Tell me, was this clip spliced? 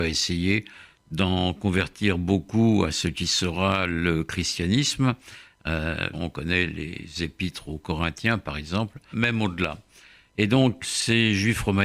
yes; 3 cuts; at 6.1 s, 9.1 s, 10.8 s

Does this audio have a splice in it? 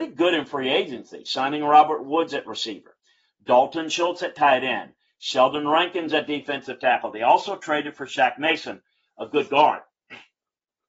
no; 0 cuts

